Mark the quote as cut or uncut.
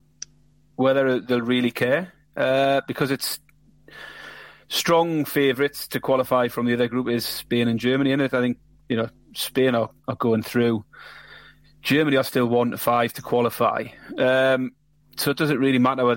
uncut